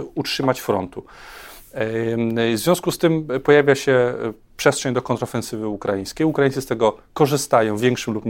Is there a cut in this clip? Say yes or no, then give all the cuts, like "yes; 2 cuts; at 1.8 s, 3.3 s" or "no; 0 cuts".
no; 0 cuts